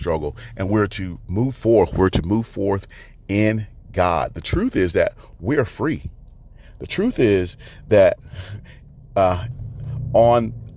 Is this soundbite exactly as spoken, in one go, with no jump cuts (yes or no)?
yes